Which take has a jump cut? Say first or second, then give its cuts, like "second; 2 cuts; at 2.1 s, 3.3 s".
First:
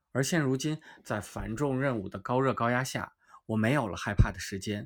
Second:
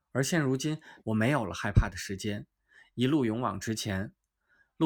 second; 1 cut; at 1.0 s